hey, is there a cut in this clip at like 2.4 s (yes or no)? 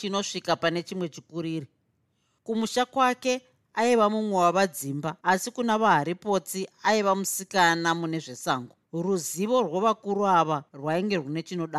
no